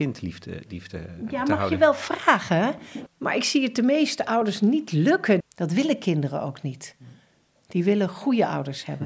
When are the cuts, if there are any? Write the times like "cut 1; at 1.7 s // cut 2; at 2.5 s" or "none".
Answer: cut 1; at 3.1 s // cut 2; at 5.4 s